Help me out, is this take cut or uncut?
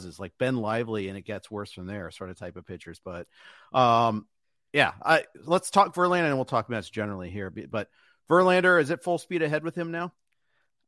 uncut